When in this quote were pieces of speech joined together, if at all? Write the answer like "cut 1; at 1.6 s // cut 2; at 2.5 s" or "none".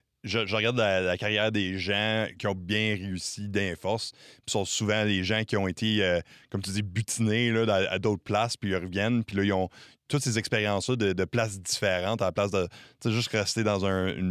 none